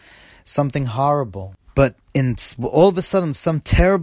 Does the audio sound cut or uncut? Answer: cut